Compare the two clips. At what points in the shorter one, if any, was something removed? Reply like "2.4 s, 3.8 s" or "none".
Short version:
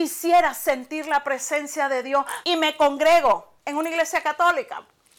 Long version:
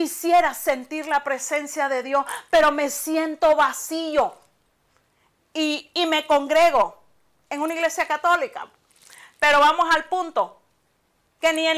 2.4 s, 3.6 s